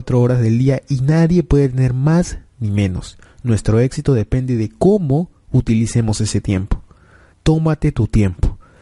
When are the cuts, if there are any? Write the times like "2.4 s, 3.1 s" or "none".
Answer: 7.3 s

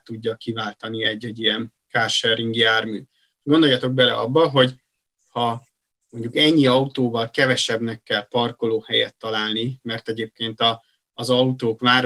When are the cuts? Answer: none

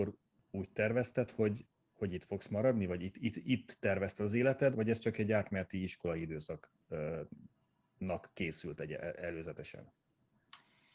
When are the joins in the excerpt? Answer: 4.7 s

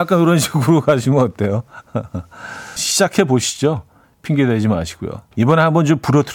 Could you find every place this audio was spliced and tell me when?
2.8 s, 5.3 s

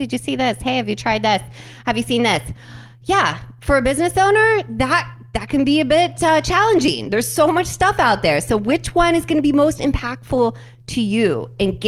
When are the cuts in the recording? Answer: none

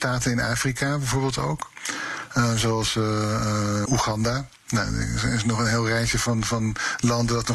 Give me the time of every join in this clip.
3.9 s

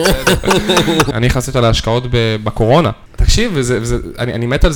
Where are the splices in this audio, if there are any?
1.1 s, 3.1 s

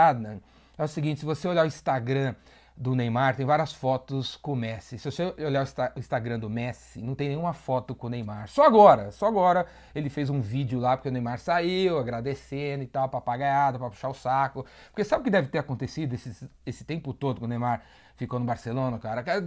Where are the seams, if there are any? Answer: none

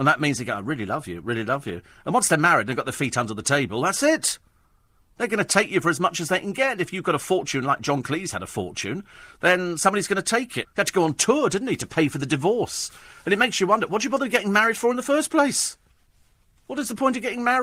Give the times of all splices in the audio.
10.6 s

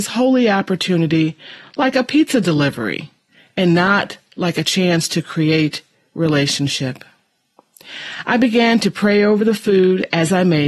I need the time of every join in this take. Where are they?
none

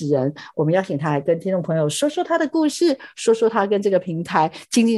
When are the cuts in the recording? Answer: none

